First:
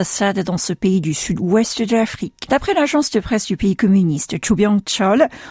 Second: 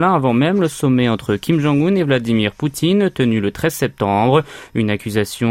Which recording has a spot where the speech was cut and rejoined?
first; 1 cut; at 2.5 s

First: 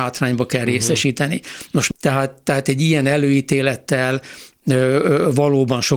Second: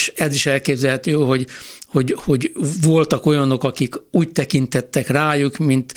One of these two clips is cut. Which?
first; 1 cut; at 1.9 s

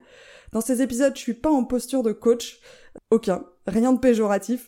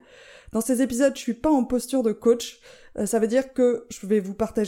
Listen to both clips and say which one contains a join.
first; 1 cut; at 3.0 s

